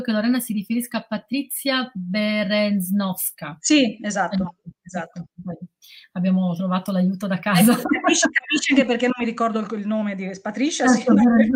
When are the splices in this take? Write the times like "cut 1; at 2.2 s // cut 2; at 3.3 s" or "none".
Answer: none